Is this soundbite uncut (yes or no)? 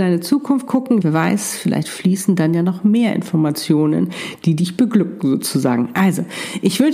no